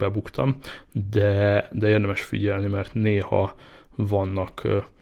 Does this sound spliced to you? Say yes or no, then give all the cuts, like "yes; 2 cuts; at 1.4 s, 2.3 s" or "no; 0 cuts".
no; 0 cuts